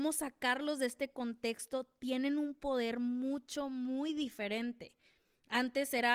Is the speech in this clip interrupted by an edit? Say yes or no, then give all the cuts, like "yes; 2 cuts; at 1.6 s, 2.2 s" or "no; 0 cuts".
no; 0 cuts